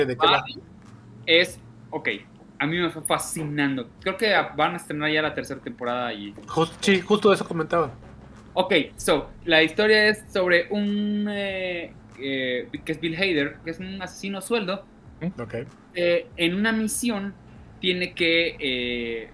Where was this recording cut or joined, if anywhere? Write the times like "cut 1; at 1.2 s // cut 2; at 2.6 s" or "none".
cut 1; at 13.6 s